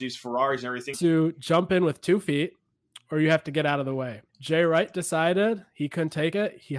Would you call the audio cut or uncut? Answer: cut